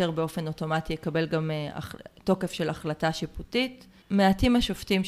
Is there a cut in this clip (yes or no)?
no